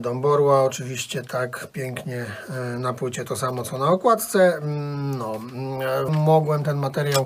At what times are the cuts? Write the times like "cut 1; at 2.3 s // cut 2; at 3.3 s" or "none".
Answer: cut 1; at 6.1 s